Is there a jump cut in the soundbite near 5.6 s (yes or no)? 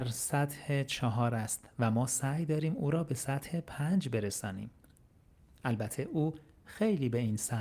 no